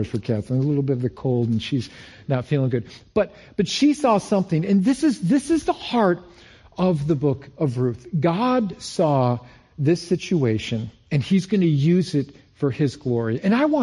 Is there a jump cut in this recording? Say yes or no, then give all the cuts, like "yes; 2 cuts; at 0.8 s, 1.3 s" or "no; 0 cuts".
no; 0 cuts